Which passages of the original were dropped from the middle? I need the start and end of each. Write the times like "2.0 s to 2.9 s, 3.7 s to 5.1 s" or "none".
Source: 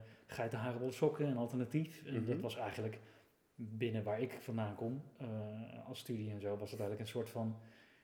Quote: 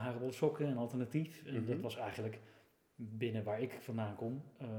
none

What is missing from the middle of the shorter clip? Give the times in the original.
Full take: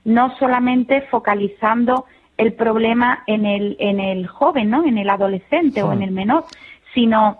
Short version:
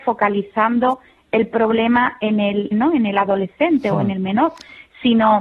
3.8 s to 4.6 s

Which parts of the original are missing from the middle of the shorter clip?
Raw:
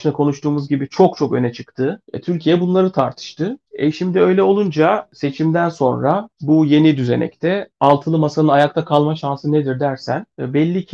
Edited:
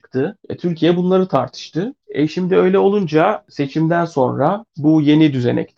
none

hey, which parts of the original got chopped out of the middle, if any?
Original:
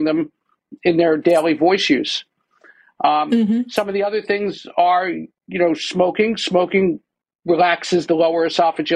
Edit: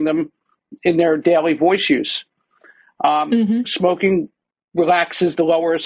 3.6 s to 6.4 s

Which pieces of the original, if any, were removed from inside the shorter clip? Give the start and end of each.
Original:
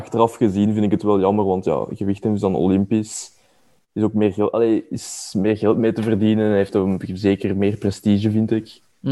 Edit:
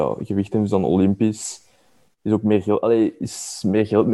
none

